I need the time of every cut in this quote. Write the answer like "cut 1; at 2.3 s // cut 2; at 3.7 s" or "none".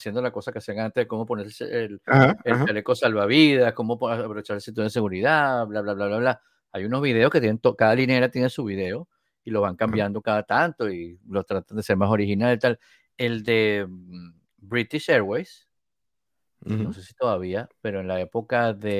none